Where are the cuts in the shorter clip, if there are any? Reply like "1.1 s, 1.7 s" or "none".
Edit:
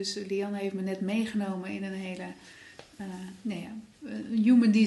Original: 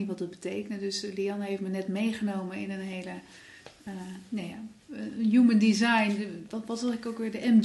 none

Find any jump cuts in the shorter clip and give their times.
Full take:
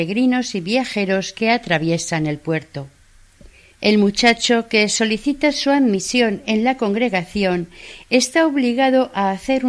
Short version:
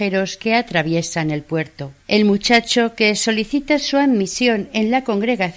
2.0 s

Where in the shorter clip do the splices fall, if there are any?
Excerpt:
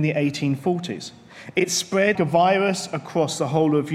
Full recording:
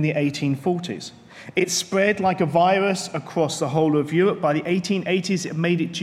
2.1 s

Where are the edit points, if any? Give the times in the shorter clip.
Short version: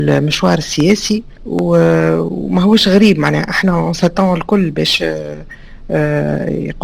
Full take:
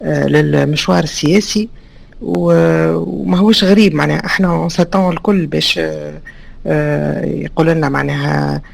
1.4 s

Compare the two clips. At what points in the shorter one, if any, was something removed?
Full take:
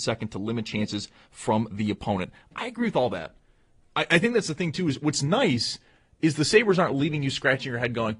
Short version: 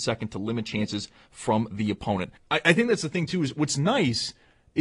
2.4 s

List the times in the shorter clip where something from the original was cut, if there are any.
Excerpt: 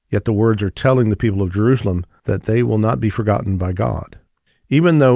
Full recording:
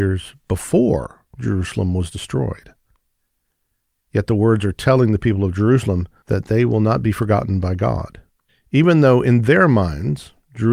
none

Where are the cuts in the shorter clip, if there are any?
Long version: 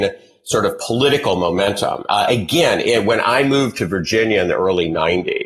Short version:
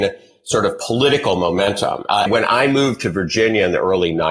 2.3 s

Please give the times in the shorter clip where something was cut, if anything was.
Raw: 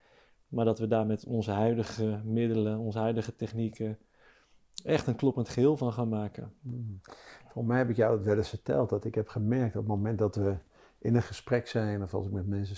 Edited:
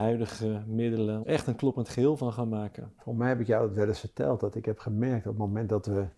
1.2 s, 3.0 s

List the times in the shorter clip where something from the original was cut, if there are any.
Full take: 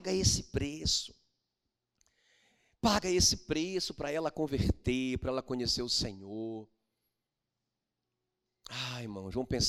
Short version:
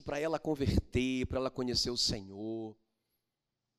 none

